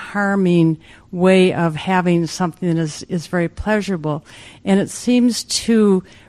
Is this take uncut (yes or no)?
yes